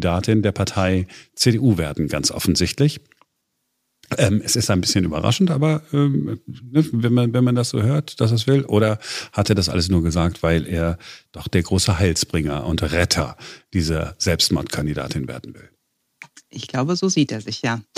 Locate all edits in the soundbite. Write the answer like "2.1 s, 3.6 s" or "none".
none